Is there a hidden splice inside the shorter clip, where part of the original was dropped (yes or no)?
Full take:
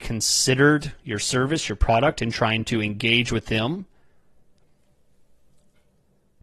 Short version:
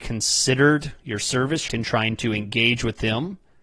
yes